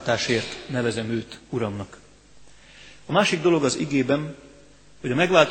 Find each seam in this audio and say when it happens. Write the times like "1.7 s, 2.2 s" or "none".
none